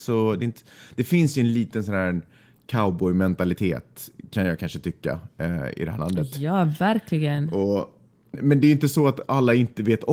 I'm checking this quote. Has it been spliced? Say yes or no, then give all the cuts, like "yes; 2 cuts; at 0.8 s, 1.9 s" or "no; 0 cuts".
yes; 1 cut; at 8.3 s